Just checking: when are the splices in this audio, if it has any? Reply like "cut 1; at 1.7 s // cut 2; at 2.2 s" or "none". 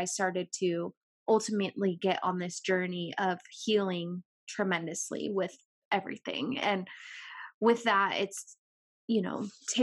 none